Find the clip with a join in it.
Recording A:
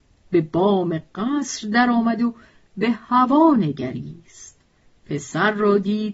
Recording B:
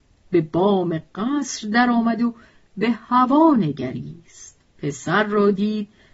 B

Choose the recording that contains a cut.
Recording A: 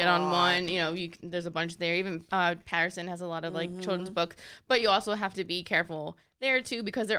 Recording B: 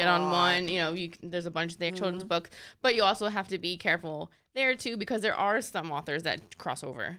B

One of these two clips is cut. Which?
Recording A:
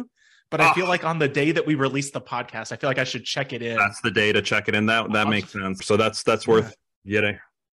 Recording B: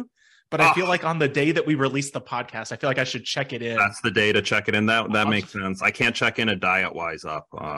A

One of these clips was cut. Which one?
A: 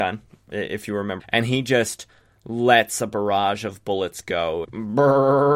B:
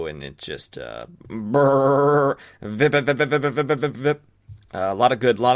A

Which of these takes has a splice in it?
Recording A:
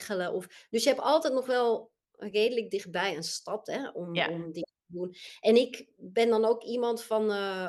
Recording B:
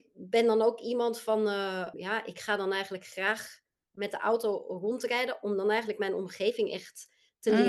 B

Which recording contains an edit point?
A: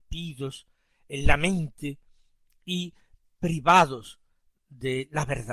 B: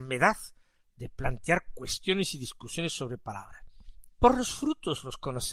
B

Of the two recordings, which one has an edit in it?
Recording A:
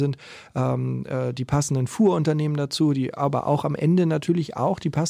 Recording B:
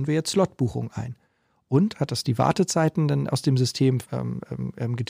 B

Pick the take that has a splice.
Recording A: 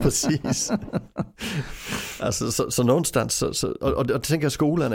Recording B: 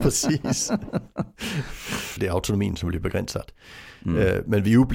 B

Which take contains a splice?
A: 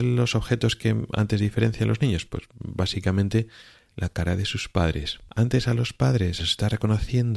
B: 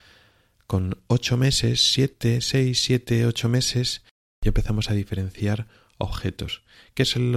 A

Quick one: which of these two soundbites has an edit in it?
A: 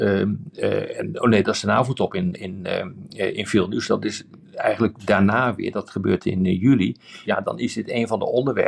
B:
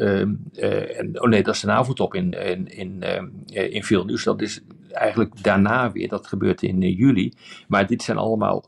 A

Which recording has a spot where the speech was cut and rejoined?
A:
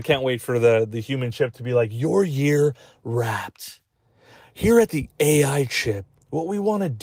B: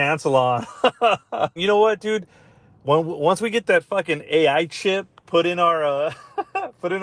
B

